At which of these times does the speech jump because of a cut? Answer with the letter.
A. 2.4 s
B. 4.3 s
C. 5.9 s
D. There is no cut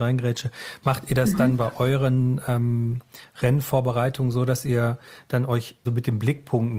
C